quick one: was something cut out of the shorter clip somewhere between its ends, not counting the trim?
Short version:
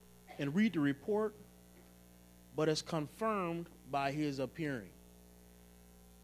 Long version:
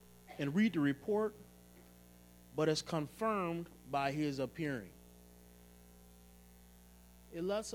no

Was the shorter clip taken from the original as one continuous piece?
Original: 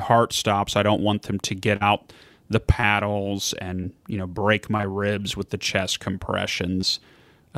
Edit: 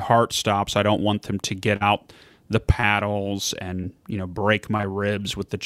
yes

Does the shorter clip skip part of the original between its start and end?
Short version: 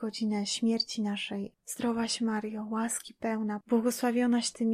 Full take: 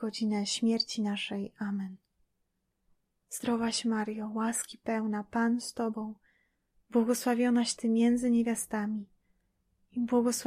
yes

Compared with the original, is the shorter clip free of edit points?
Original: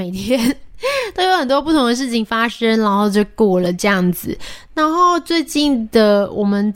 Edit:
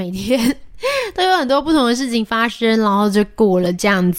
yes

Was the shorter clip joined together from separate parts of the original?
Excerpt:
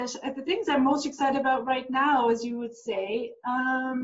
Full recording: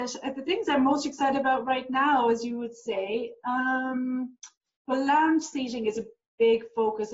no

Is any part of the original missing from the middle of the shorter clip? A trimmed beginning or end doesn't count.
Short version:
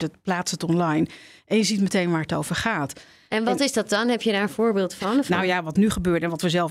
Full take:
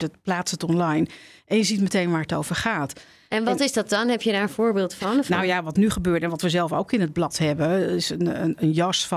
no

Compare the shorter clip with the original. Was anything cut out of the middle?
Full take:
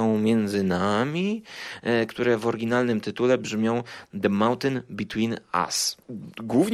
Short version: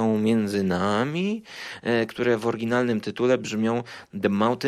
no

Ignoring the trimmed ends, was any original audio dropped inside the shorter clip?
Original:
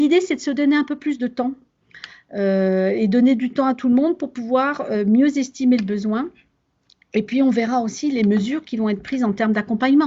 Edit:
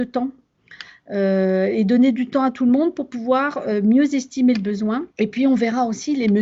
yes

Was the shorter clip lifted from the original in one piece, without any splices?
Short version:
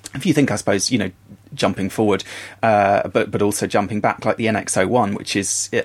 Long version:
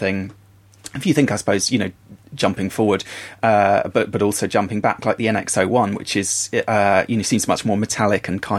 yes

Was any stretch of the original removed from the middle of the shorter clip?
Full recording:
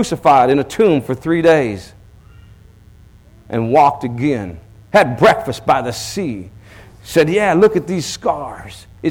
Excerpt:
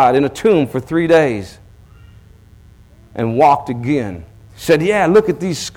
yes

